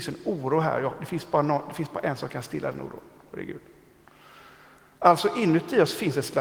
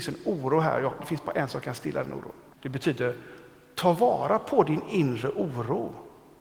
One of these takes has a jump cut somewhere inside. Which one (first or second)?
second